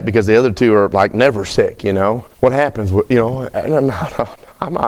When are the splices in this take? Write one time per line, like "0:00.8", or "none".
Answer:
0:02.3